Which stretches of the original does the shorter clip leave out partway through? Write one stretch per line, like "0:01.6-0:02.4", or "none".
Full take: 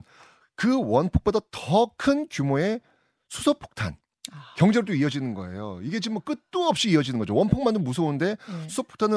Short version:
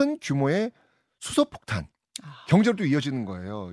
none